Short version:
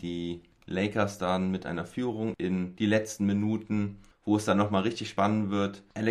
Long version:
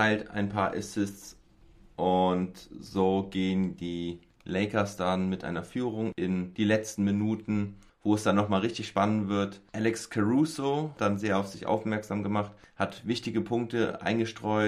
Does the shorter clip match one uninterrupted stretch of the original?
yes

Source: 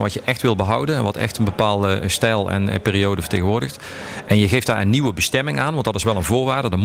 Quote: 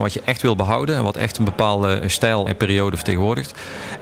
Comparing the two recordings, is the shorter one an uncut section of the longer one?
no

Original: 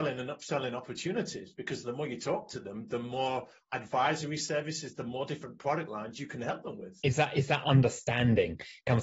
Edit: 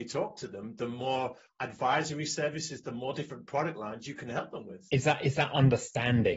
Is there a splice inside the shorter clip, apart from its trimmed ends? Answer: no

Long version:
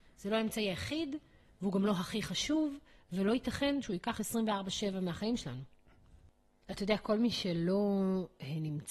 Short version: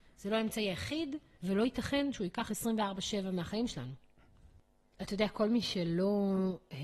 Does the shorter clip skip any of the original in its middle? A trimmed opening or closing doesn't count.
yes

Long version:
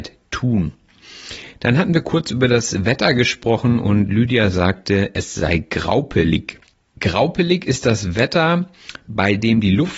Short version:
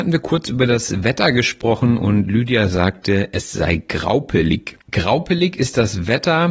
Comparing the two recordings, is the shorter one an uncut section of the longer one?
no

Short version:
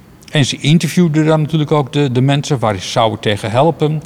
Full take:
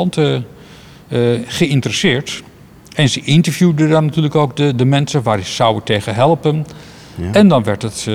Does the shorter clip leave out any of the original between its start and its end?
no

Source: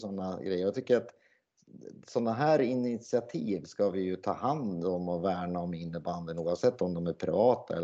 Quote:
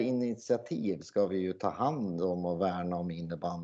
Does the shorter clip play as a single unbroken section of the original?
yes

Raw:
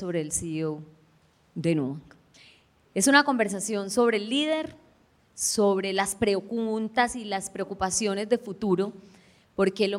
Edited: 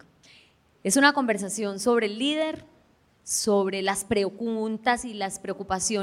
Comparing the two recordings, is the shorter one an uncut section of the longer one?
yes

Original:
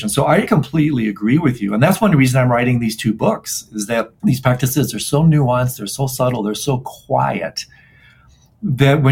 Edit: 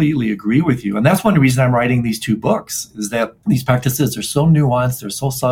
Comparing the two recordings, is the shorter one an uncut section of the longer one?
yes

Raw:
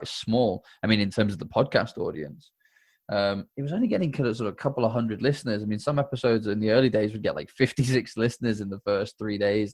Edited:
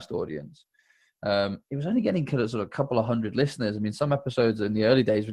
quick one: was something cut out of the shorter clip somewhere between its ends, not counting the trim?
no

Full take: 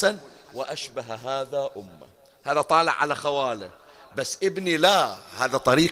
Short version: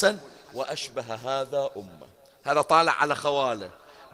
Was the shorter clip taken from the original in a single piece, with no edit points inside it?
yes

